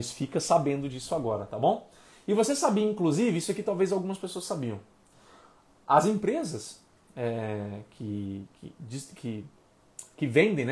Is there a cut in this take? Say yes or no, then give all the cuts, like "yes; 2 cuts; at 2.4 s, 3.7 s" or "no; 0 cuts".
no; 0 cuts